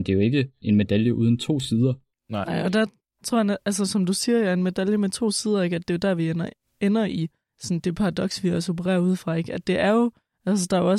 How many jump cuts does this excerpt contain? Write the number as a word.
zero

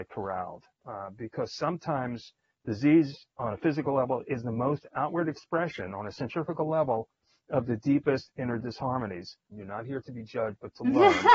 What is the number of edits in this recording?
one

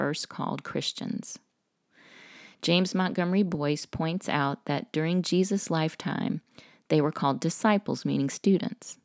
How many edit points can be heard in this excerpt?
zero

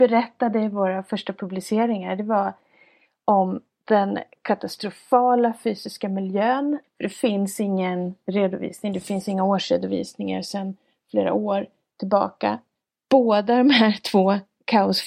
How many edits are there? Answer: one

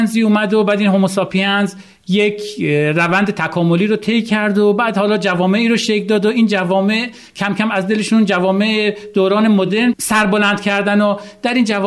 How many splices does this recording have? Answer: zero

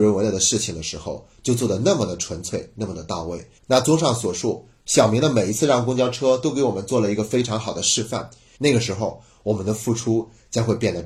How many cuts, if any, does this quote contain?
two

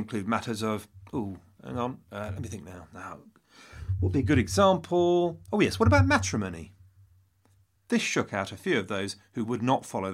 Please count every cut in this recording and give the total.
zero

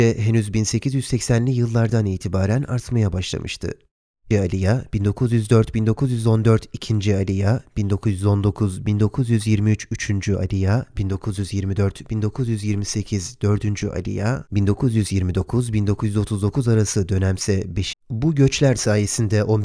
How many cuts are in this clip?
two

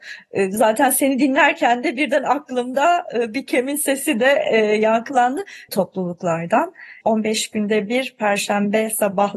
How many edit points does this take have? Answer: two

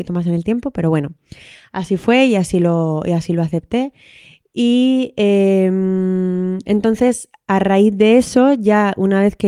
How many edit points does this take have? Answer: zero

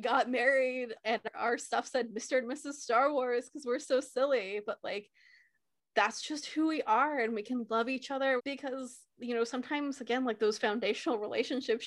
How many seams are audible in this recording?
one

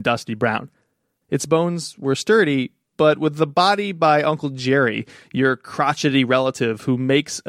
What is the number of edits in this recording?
one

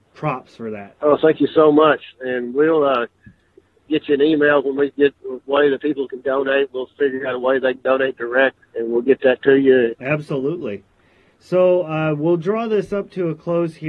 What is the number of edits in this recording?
three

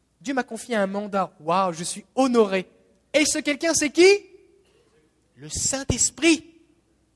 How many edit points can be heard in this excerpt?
one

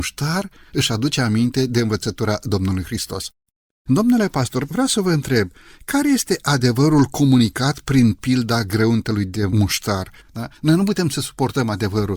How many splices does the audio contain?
two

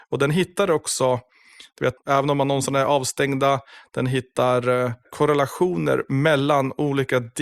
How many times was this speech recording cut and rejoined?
one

